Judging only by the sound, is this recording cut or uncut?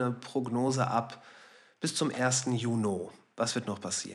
uncut